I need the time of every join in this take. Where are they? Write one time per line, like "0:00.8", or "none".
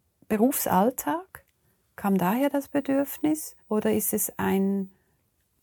0:03.6